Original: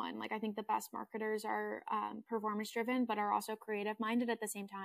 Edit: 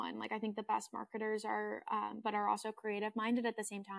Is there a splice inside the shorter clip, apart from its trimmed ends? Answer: yes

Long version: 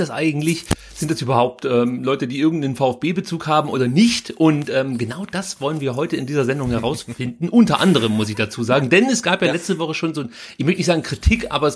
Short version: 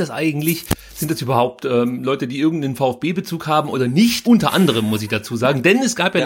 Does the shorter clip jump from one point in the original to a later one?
yes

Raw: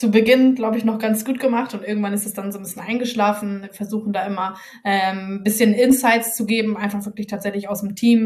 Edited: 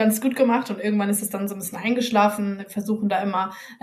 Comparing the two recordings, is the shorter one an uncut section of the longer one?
yes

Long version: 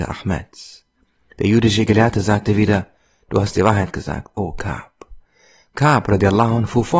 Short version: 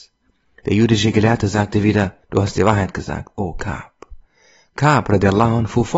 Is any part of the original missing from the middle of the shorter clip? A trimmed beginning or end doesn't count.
yes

